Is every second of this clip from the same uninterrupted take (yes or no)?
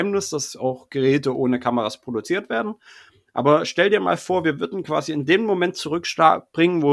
yes